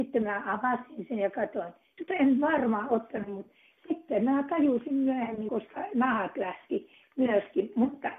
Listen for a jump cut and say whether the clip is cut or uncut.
cut